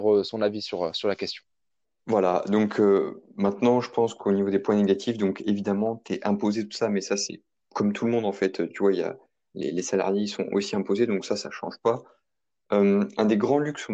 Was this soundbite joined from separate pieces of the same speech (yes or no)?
no